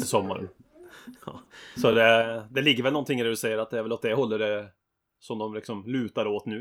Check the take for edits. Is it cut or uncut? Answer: uncut